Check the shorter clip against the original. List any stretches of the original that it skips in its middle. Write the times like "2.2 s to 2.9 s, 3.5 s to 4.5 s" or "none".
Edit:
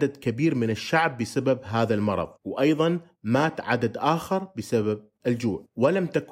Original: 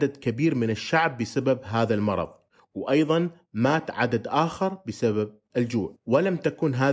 2.3 s to 2.6 s